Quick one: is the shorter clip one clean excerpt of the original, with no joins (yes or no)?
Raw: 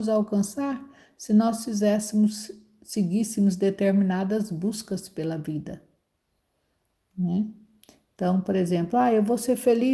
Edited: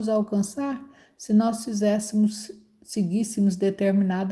yes